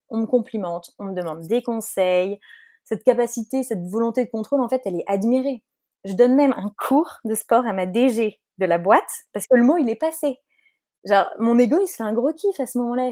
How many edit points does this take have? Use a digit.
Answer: 0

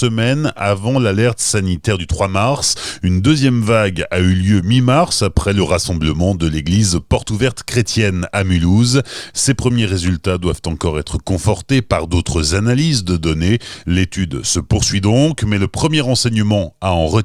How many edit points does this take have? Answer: 1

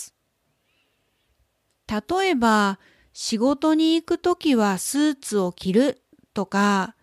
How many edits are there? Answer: 0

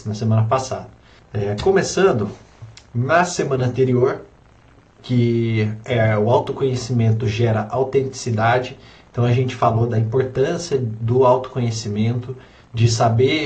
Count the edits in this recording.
2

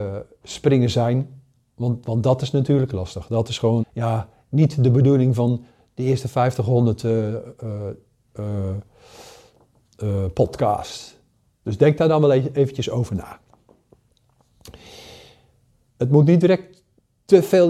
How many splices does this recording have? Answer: 2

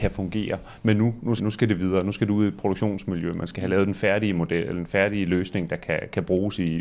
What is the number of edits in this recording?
1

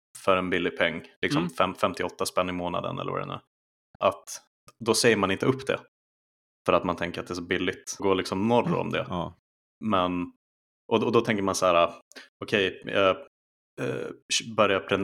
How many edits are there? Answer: 2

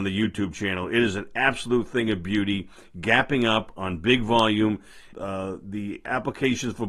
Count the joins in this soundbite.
1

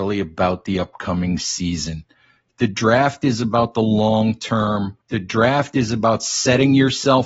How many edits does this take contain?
1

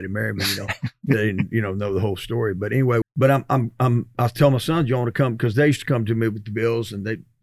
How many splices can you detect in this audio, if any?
1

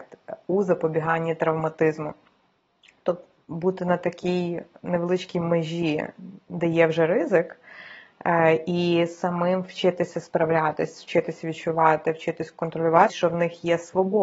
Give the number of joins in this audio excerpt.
2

